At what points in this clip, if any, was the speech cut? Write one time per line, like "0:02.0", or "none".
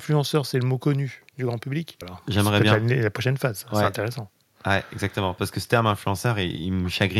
0:02.0